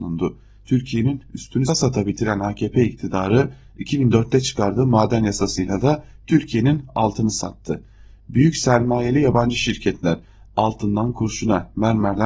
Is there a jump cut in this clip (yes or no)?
yes